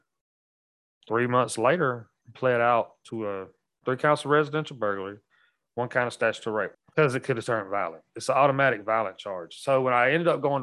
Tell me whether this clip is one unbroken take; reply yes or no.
no